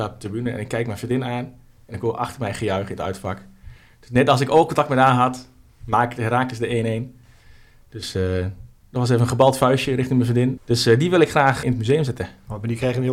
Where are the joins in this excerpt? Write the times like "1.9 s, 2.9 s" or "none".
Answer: 10.6 s, 11.6 s